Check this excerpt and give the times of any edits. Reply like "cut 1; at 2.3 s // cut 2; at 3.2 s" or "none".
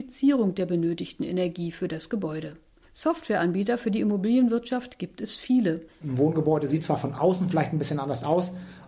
cut 1; at 2.8 s // cut 2; at 6.0 s